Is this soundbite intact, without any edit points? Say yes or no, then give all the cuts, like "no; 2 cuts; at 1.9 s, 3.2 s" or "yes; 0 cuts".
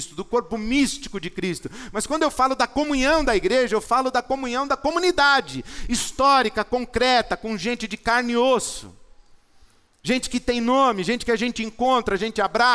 yes; 0 cuts